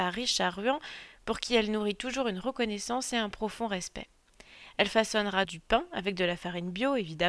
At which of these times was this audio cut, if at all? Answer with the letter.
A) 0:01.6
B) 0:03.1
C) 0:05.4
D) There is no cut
C